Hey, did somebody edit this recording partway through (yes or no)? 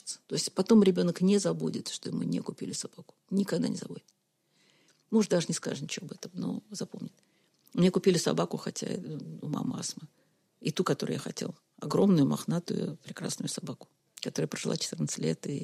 no